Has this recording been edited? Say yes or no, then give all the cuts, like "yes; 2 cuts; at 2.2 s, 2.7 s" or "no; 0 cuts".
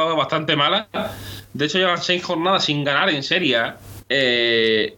yes; 1 cut; at 4.0 s